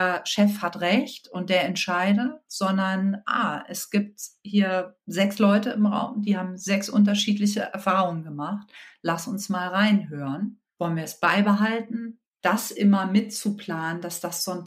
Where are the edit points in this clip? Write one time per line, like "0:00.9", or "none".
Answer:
0:12.3

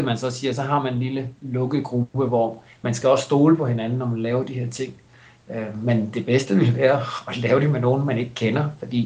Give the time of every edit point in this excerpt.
none

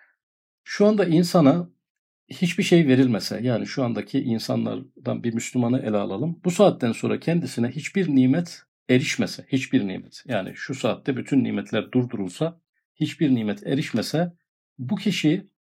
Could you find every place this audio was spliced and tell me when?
none

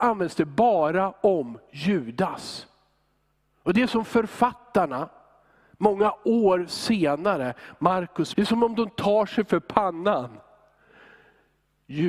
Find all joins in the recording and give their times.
0:08.3

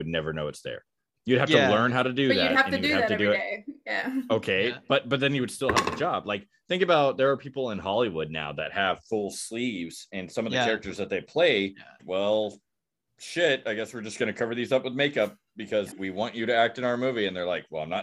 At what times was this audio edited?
0:12.0
0:15.9

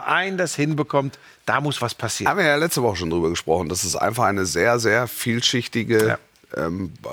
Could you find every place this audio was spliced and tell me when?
none

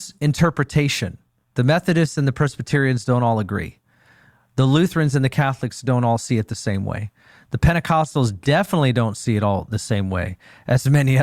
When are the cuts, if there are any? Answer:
none

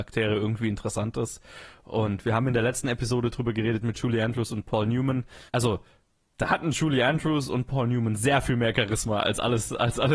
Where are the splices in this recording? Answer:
0:05.5

